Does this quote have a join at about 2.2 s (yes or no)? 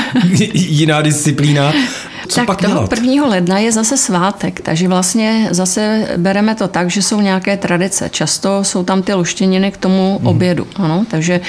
yes